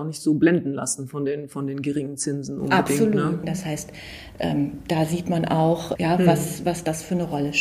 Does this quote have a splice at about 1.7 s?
no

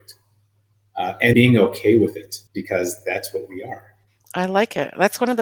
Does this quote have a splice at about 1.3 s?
yes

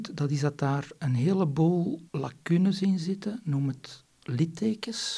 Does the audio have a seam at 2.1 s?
yes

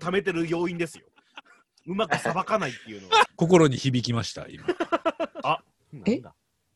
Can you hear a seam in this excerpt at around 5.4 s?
yes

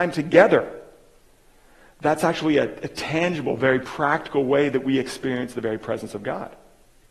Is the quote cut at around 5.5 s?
no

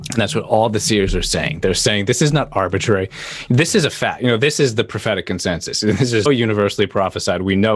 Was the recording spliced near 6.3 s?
yes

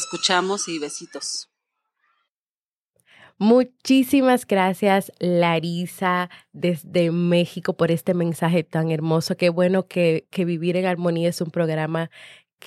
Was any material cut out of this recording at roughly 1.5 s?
no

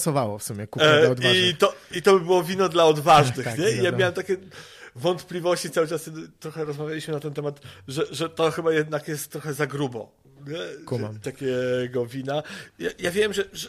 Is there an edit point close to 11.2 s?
yes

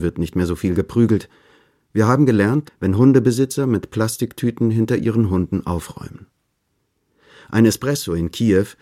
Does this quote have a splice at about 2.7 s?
yes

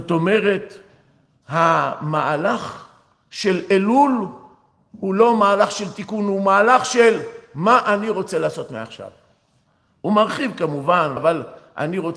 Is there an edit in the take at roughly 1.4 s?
no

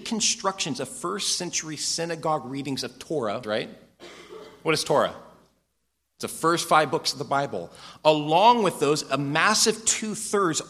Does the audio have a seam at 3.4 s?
yes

